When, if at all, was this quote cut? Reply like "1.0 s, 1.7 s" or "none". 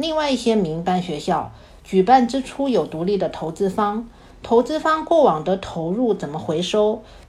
none